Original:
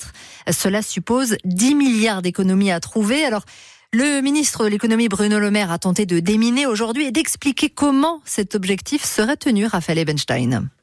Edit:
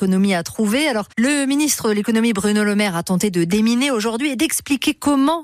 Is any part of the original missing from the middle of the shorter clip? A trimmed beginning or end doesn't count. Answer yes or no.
yes